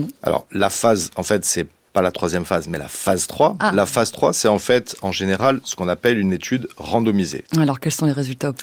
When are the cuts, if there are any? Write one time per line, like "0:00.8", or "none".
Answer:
0:07.4

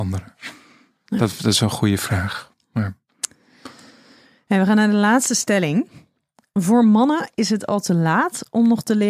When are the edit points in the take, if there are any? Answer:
none

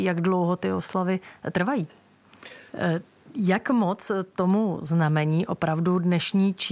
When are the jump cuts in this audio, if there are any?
0:02.7

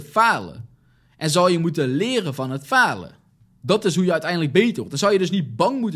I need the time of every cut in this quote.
none

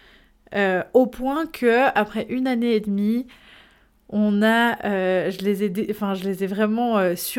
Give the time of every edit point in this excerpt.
none

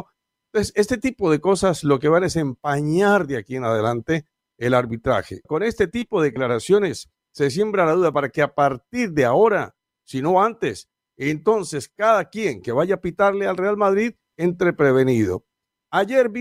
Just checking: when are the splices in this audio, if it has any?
0:05.4

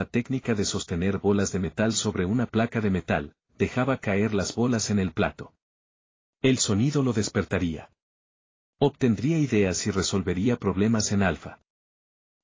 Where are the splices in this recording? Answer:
0:03.5

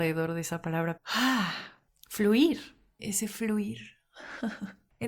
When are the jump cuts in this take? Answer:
0:01.0
0:03.0

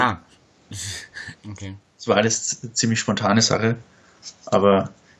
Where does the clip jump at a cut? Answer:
0:01.4

